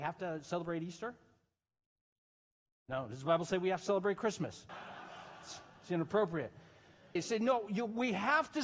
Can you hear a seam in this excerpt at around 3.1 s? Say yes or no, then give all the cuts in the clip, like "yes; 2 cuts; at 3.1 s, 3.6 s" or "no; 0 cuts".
no; 2 cuts; at 4.7 s, 7.2 s